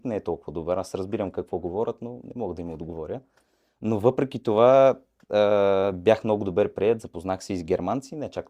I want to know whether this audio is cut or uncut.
uncut